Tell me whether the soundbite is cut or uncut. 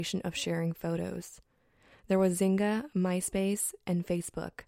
uncut